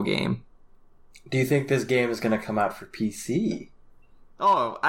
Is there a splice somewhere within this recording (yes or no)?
no